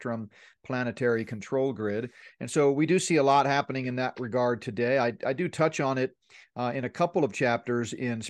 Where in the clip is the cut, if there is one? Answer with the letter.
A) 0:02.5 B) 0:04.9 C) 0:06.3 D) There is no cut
D